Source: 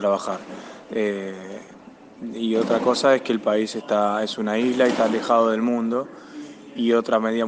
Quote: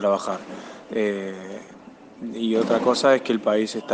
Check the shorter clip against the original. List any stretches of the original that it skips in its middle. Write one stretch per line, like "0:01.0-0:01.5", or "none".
none